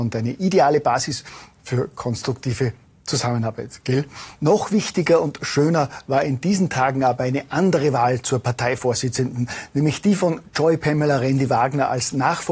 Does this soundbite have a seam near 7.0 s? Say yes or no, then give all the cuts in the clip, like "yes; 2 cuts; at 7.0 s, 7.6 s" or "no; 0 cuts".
no; 1 cut; at 4.4 s